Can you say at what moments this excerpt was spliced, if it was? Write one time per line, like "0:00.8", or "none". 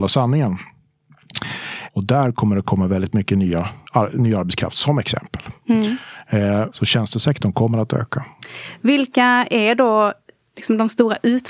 0:01.9
0:03.9
0:06.7